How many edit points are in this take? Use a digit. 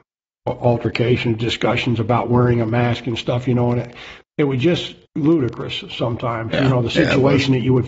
1